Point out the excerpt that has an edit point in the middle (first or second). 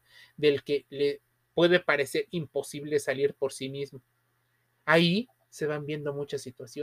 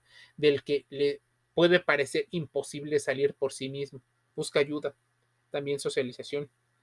second